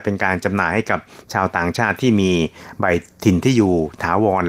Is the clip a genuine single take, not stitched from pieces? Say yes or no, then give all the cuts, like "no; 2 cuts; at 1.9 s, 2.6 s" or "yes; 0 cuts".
yes; 0 cuts